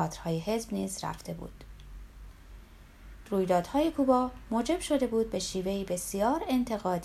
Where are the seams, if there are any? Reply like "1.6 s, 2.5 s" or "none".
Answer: 3.2 s

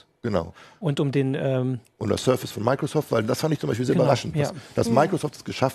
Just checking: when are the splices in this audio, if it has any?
none

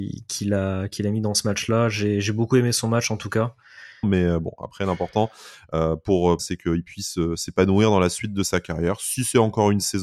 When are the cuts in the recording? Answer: 4.0 s, 6.4 s

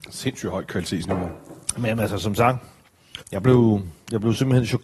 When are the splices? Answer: 3.2 s

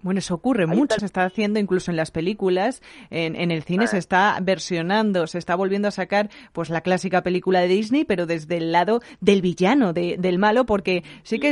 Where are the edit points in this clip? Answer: 1.0 s

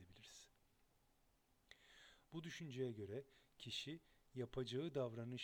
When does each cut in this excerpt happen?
2.2 s

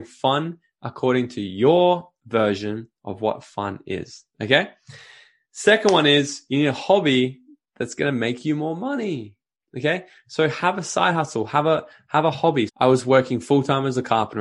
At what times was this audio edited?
12.7 s

